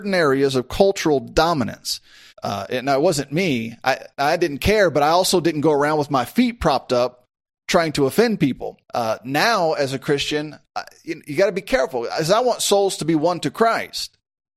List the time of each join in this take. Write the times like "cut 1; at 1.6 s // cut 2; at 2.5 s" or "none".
cut 1; at 2.3 s // cut 2; at 8.8 s